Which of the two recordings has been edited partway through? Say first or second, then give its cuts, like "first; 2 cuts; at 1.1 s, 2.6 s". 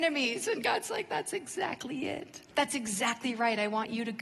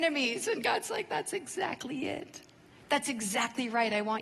first; 1 cut; at 2.5 s